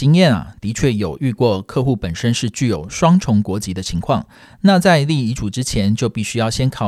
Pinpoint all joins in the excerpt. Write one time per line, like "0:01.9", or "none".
none